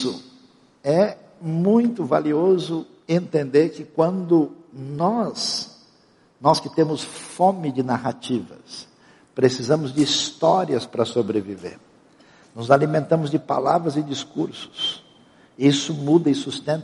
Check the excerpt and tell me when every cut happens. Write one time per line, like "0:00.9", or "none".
none